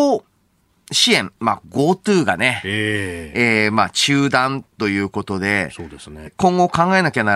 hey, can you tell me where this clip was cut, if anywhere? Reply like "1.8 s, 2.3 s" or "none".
6.3 s